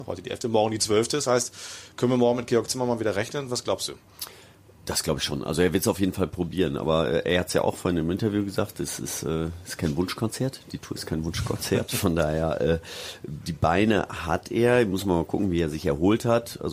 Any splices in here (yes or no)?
no